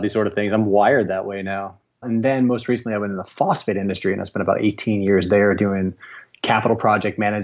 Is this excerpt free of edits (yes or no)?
no